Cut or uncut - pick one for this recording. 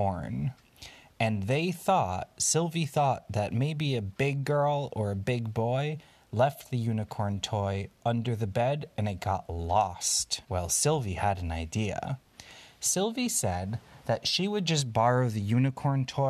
cut